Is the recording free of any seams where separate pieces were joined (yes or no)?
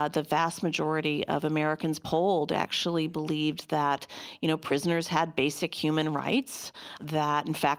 yes